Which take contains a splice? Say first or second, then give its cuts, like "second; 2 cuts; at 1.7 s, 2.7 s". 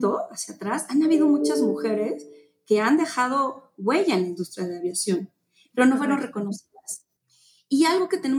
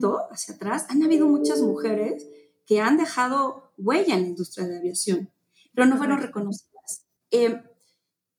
second; 1 cut; at 7.2 s